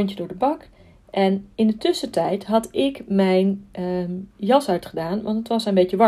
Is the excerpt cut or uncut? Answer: uncut